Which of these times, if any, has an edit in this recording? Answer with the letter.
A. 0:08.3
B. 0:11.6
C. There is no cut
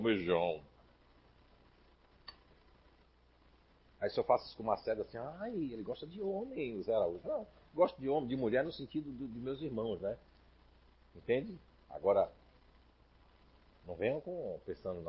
C